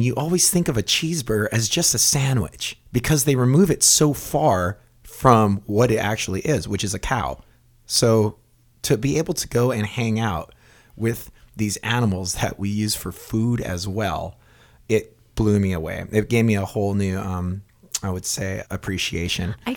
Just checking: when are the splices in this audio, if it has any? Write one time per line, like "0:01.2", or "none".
0:18.6